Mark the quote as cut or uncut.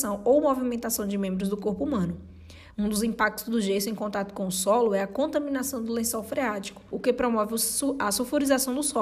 cut